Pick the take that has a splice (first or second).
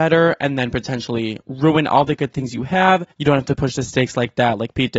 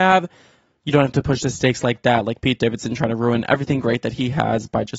first